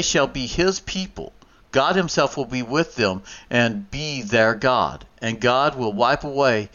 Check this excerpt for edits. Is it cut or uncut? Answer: uncut